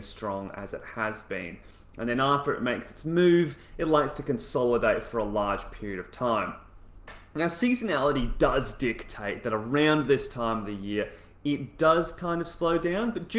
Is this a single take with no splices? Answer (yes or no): yes